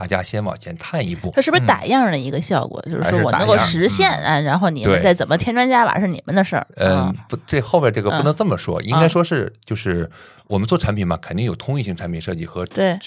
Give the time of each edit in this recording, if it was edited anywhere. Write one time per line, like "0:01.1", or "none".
none